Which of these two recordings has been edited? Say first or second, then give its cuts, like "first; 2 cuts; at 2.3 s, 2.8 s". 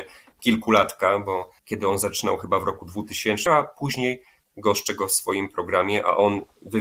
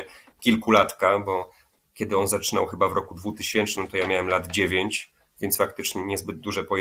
first; 2 cuts; at 1.6 s, 3.5 s